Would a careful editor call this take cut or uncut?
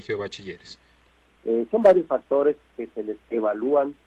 cut